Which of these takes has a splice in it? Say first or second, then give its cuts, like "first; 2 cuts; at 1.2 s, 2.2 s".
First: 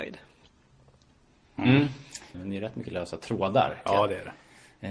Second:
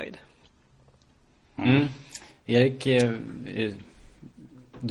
first; 1 cut; at 2.3 s